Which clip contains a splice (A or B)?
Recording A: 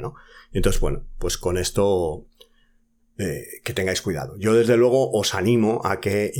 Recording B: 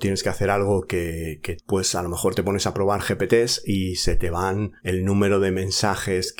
B